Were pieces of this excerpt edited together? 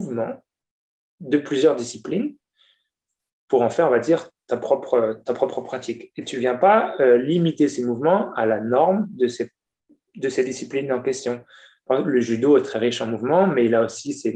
no; 0 cuts

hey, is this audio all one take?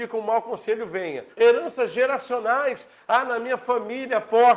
no; 1 cut; at 1.3 s

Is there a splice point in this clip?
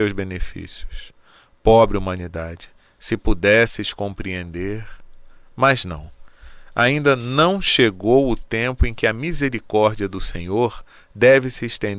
no; 0 cuts

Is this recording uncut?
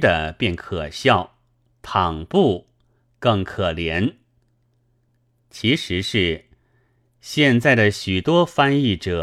yes; 0 cuts

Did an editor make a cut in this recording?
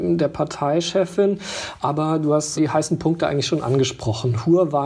yes; 1 cut; at 2.6 s

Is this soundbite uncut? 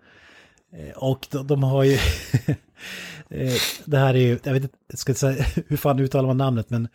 yes; 0 cuts

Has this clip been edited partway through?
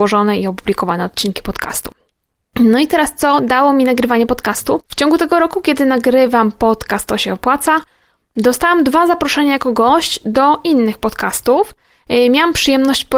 no; 0 cuts

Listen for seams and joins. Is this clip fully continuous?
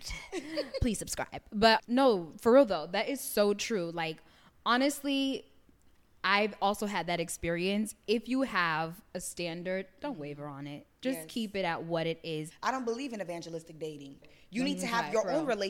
no; 3 cuts; at 1.8 s, 12.5 s, 14.2 s

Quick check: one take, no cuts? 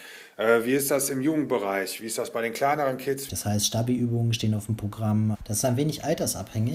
no; 2 cuts; at 3.3 s, 5.3 s

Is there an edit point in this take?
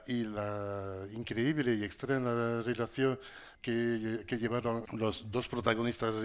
no; 0 cuts

